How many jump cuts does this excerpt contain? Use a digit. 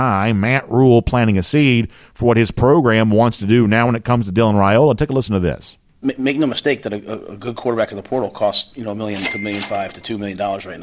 0